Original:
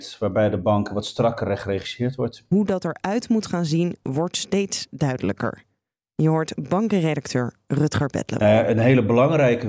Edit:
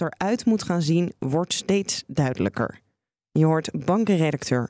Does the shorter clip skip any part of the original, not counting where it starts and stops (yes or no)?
no